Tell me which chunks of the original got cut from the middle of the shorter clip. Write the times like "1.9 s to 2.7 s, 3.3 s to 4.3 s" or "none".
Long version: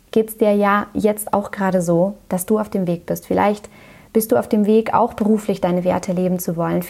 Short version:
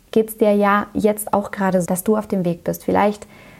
1.9 s to 2.3 s